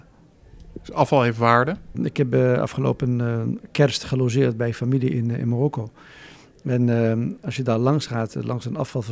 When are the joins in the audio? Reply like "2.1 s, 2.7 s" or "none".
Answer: 1.9 s